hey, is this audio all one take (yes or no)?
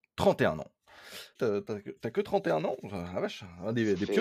no